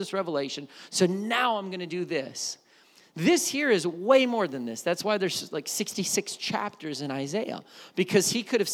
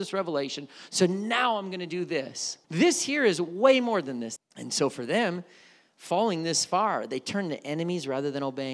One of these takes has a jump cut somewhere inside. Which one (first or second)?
second